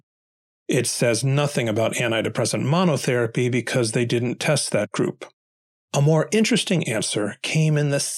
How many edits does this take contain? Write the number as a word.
zero